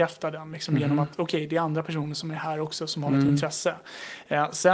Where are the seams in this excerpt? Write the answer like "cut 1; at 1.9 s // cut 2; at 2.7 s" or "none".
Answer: none

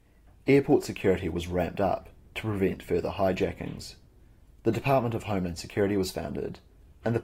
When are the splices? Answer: none

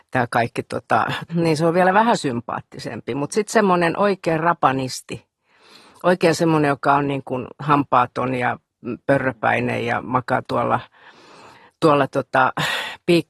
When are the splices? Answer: cut 1; at 1.3 s

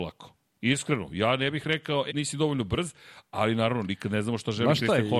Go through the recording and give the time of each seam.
cut 1; at 2.1 s

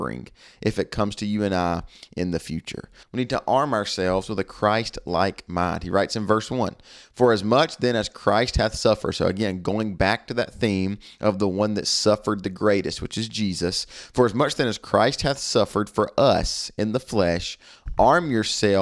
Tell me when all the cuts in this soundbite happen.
cut 1; at 3.0 s

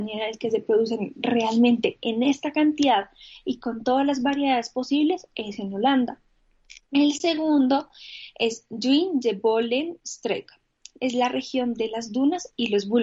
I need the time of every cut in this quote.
none

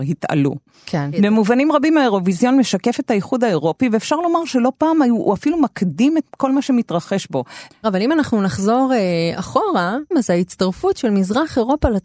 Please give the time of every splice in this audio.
cut 1; at 7.7 s // cut 2; at 10.1 s

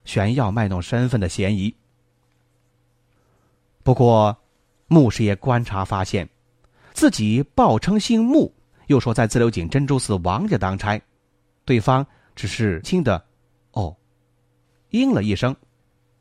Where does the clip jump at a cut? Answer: cut 1; at 12.8 s

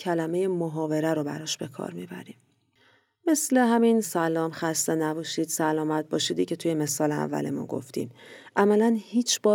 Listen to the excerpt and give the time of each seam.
cut 1; at 4.0 s

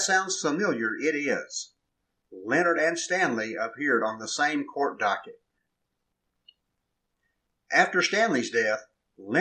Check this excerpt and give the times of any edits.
none

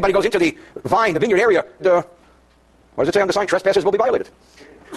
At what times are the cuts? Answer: cut 1; at 1.8 s

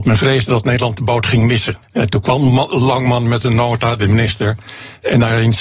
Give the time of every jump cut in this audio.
cut 1; at 1.8 s

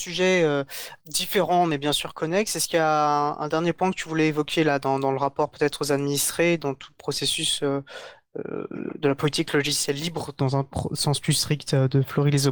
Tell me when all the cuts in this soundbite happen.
cut 1; at 1.0 s

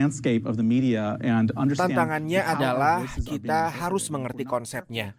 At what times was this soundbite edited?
none

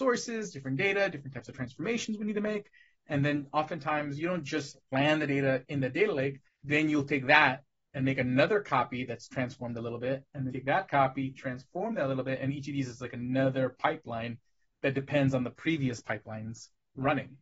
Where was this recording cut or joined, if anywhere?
cut 1; at 6.4 s // cut 2; at 10.5 s

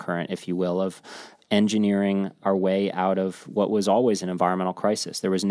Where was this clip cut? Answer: none

